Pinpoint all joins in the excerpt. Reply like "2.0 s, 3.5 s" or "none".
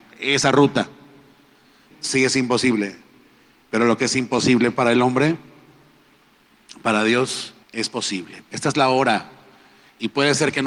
1.9 s, 7.6 s